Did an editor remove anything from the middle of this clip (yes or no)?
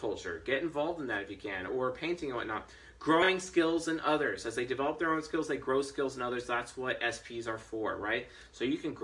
yes